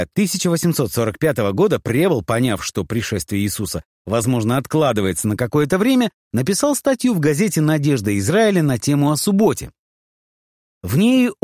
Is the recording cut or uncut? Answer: uncut